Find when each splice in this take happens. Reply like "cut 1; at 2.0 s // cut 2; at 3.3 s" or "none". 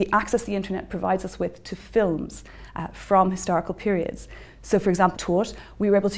cut 1; at 5.1 s